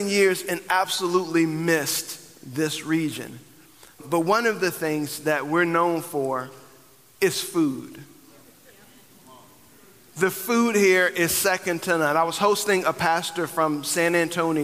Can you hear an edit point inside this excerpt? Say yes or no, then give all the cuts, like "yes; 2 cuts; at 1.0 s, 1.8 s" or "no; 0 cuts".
yes; 1 cut; at 4.0 s